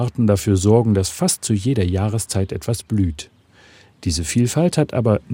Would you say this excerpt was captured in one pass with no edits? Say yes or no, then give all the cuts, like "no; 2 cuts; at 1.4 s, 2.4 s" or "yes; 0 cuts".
yes; 0 cuts